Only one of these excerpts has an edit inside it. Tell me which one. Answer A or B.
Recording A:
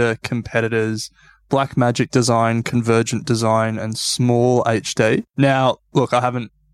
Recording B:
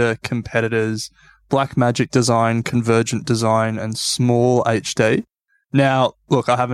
A